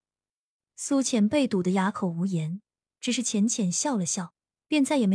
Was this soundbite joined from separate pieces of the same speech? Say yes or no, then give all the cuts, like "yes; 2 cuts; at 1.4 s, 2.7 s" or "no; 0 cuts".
no; 0 cuts